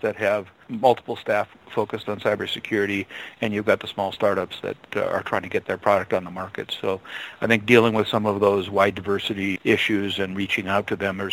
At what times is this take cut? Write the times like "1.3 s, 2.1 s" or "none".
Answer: 9.6 s

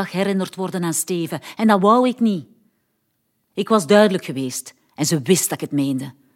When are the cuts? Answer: none

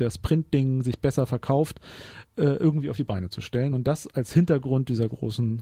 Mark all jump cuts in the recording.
none

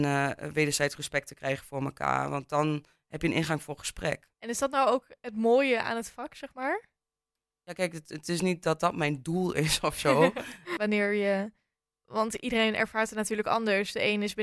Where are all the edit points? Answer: 4.3 s, 10.8 s

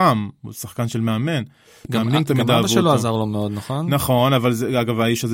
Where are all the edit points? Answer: none

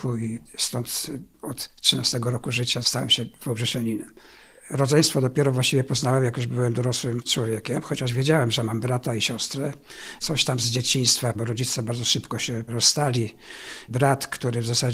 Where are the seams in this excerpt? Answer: none

